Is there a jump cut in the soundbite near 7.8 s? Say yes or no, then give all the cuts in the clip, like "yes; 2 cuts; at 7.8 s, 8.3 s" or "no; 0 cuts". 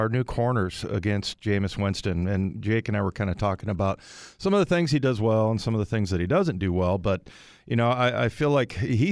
no; 0 cuts